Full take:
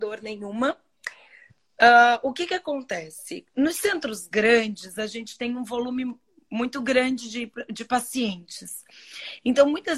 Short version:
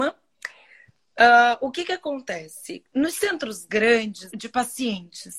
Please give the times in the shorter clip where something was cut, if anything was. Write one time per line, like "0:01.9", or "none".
0:04.3